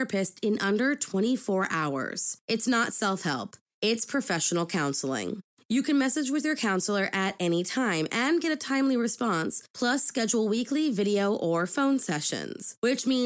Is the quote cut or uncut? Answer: uncut